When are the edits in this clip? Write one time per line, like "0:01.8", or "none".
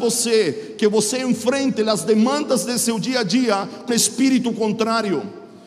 0:03.9